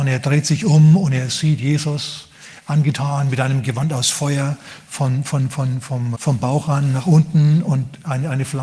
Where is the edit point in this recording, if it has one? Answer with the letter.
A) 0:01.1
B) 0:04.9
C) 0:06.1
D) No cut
C